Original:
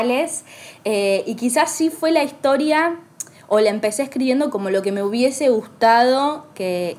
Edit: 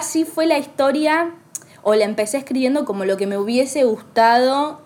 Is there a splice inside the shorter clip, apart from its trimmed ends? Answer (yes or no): no